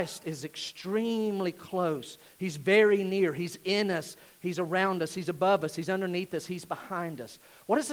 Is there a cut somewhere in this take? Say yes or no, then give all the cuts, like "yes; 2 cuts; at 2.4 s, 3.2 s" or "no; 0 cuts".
no; 0 cuts